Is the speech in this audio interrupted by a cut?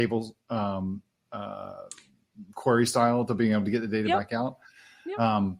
no; 0 cuts

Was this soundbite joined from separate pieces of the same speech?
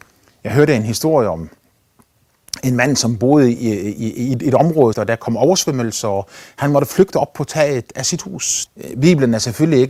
yes; 2 cuts; at 4.9 s, 8.7 s

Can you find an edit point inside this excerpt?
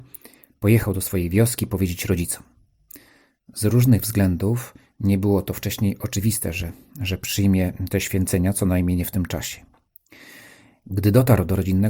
no; 0 cuts

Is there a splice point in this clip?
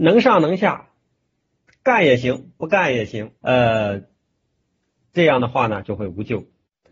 yes; 2 cuts; at 3.4 s, 5.8 s

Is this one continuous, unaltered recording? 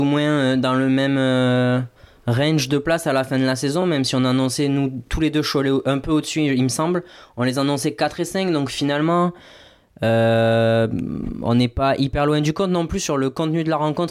yes; 0 cuts

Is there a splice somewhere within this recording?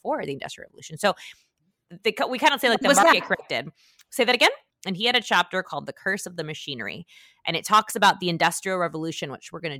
yes; 1 cut; at 4.7 s

